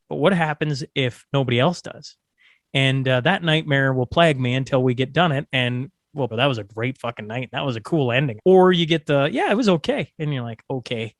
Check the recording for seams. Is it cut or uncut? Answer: cut